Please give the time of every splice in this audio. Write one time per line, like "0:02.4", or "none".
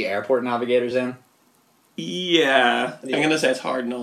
none